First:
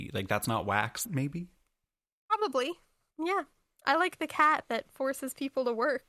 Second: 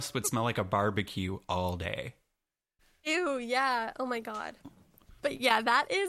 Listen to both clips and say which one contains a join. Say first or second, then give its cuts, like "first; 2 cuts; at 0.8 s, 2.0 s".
first; 2 cuts; at 1.0 s, 3.1 s